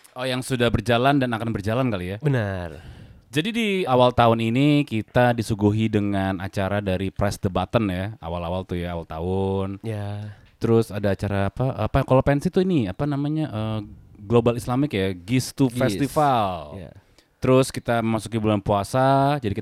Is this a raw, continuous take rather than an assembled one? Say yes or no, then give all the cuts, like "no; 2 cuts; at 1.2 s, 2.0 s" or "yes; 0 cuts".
no; 1 cut; at 3.9 s